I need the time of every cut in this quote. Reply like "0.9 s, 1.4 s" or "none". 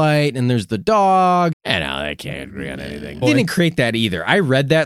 1.5 s, 3.2 s